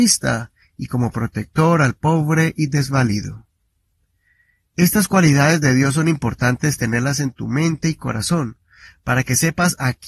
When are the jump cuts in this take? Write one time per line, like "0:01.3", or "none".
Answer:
none